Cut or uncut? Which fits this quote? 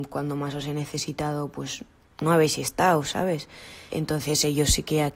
cut